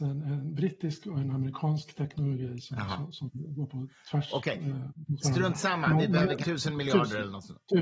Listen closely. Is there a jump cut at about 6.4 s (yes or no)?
yes